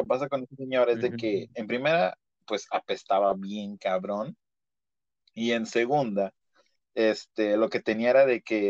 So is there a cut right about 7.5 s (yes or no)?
no